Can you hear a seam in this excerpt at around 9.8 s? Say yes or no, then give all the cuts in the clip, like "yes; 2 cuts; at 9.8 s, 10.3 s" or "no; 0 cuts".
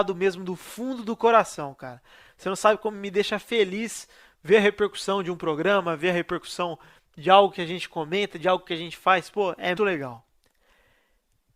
yes; 1 cut; at 9.8 s